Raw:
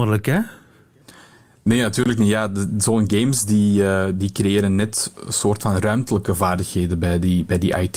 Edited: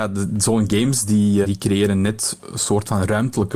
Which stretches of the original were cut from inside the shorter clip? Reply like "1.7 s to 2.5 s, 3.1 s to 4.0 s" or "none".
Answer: 3.8 s to 4.2 s

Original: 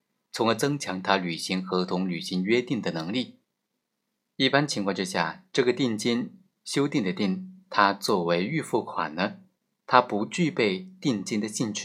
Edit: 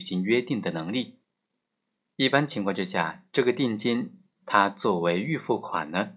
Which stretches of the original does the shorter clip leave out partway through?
6.6 s to 7.6 s

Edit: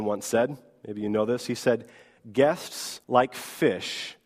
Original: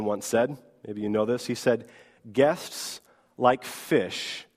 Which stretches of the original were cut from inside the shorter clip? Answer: 3.0 s to 3.3 s

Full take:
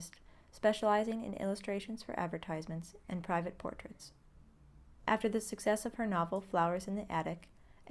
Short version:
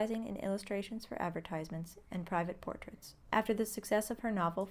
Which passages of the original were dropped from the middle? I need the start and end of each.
4.2 s to 5.0 s

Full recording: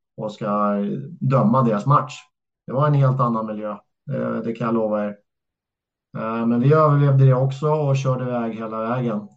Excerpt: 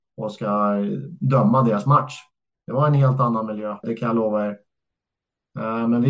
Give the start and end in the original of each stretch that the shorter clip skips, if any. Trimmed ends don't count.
3.8 s to 4.4 s

